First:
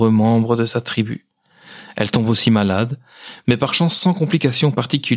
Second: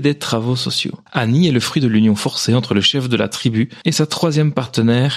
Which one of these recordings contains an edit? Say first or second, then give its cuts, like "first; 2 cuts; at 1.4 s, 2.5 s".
second; 2 cuts; at 1.1 s, 3.8 s